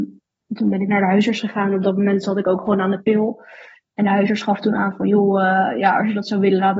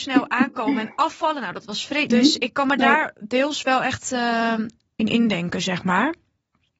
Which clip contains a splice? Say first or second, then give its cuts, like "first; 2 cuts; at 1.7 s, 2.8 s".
second; 1 cut; at 2.1 s